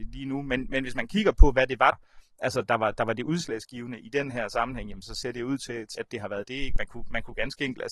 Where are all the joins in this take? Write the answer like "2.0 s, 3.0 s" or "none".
1.9 s, 6.0 s

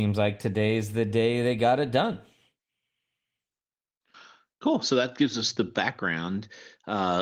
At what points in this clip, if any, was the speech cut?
none

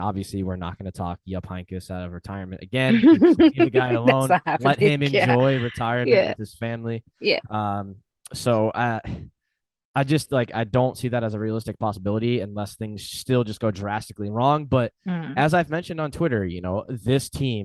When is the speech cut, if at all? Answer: none

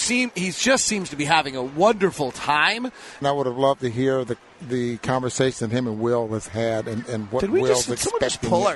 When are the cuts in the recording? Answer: 3.2 s

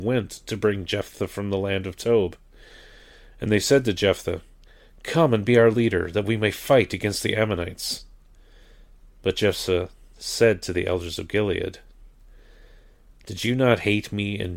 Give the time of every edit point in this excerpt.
none

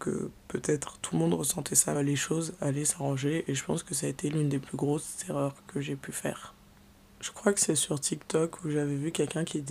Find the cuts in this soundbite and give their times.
1.9 s

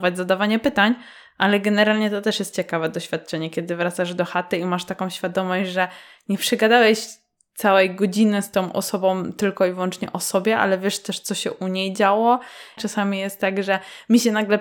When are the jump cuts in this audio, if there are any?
12.8 s

